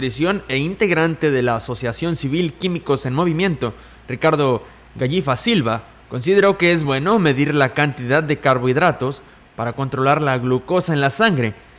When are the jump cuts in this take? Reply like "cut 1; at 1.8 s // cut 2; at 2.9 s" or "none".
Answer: none